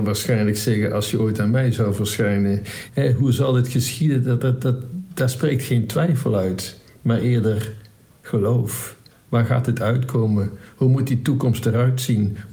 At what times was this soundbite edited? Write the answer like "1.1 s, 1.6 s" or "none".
2.9 s